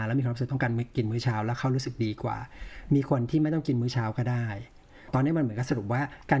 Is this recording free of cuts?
yes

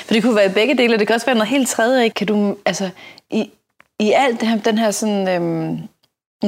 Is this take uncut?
no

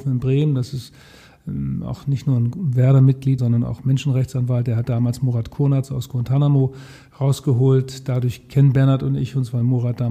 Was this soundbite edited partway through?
yes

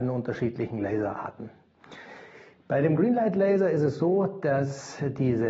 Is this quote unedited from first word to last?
yes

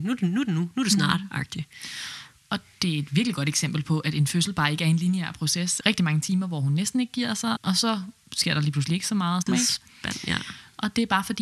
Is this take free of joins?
no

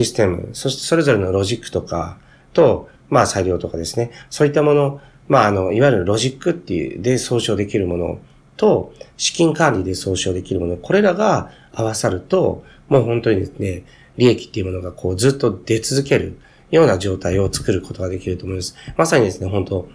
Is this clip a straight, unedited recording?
yes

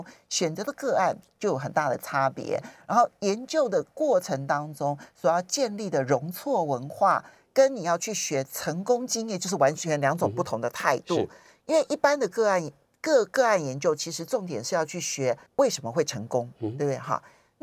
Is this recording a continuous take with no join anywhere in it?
no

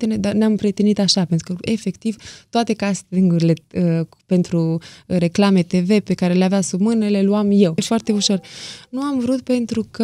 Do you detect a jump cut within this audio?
yes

